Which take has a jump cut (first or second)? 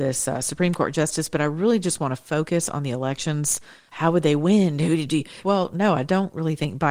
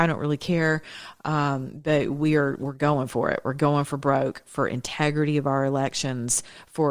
first